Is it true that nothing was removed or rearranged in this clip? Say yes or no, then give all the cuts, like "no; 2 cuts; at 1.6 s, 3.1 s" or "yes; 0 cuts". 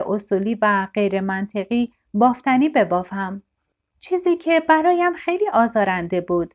yes; 0 cuts